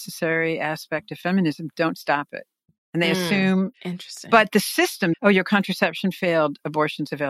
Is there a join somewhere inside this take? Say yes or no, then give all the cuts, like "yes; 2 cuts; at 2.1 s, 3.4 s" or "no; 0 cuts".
yes; 2 cuts; at 3.7 s, 5.1 s